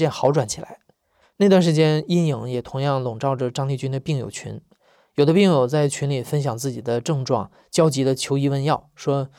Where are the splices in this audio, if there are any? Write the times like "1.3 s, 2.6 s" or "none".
1.2 s